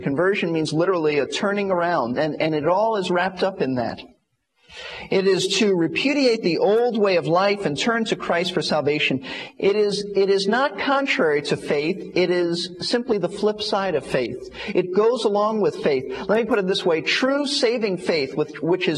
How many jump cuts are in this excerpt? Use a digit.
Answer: 1